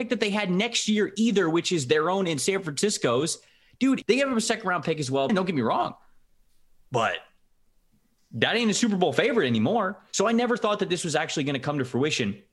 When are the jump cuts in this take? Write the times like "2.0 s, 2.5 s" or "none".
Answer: 4.0 s, 5.3 s